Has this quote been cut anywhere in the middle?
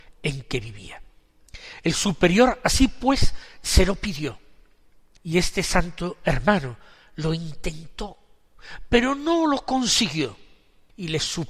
no; 0 cuts

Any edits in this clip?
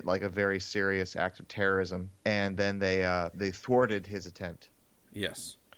yes; 2 cuts; at 2.2 s, 3.3 s

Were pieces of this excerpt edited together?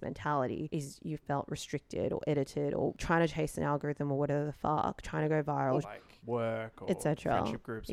yes; 1 cut; at 5.8 s

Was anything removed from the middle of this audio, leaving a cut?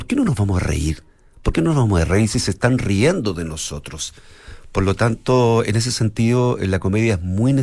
no; 0 cuts

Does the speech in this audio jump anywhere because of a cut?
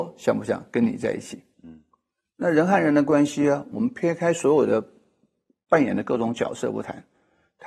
yes; 1 cut; at 1.5 s

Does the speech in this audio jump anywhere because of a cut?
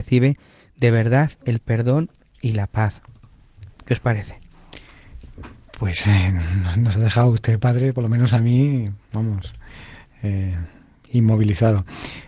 no; 0 cuts

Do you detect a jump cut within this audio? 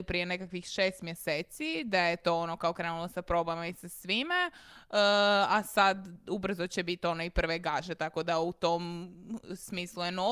no; 0 cuts

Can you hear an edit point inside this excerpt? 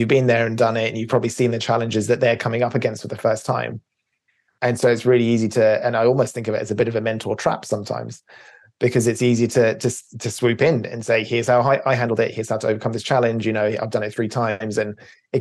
no; 0 cuts

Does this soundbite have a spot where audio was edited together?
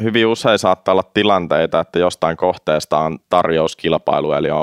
no; 0 cuts

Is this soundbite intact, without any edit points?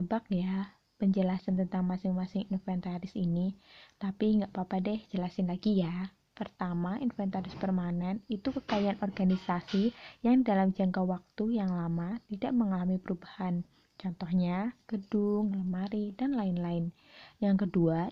yes; 0 cuts

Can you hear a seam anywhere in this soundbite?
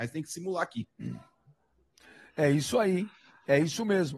no; 0 cuts

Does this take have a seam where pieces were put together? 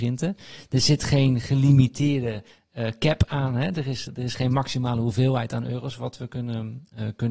yes; 1 cut; at 4.1 s

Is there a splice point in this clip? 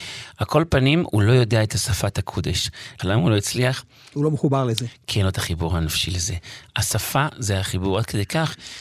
yes; 1 cut; at 3.0 s

